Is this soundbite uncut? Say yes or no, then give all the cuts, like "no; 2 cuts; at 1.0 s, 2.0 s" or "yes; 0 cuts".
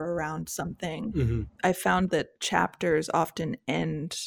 no; 1 cut; at 1.6 s